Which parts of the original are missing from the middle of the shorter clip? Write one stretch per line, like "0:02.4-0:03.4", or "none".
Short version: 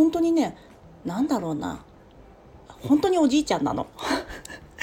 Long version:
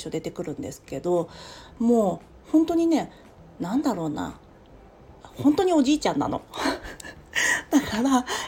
none